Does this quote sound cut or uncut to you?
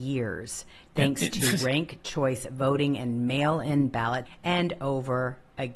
cut